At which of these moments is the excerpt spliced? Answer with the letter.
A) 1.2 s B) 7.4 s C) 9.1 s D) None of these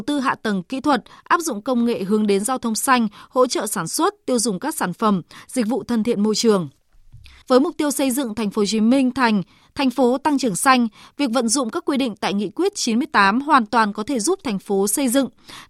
B